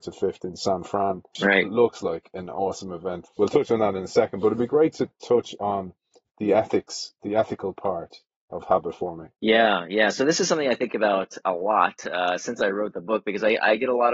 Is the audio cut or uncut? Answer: uncut